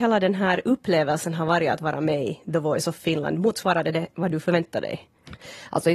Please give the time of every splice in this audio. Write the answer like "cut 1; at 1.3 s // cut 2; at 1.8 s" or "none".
none